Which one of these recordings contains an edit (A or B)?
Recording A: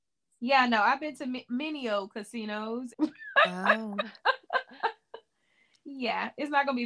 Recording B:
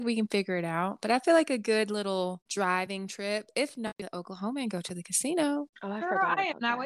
A